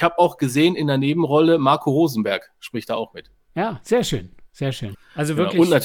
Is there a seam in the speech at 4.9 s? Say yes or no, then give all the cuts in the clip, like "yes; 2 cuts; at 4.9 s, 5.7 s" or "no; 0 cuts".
yes; 1 cut; at 4.9 s